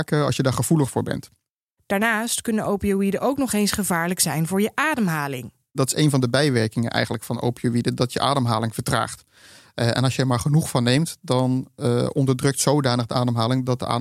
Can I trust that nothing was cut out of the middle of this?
yes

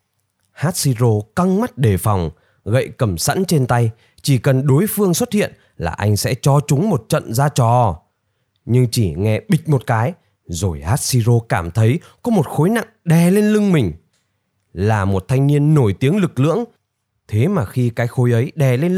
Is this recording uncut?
yes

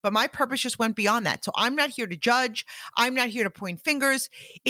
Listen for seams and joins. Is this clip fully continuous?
yes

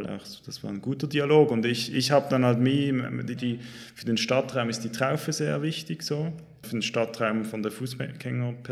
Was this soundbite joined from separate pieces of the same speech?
yes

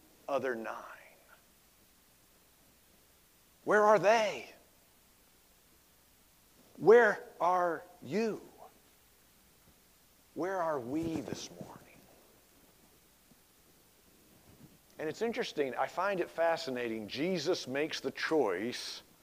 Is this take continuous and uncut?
yes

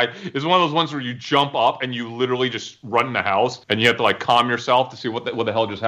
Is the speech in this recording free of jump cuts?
no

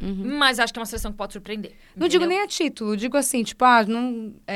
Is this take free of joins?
yes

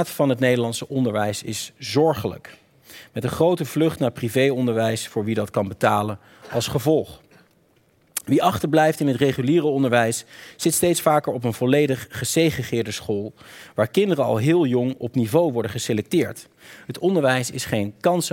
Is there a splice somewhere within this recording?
no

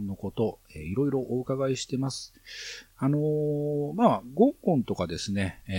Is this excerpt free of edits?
yes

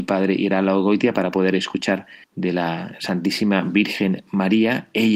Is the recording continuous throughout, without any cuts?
no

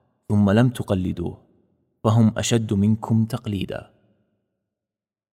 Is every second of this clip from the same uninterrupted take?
yes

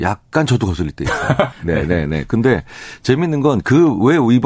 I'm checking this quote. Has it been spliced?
yes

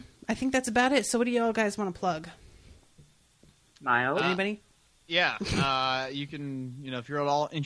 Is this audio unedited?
yes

